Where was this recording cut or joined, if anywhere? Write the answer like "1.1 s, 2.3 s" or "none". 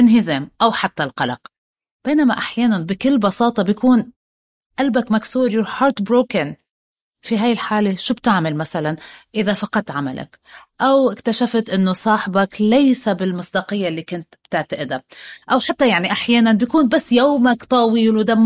16.1 s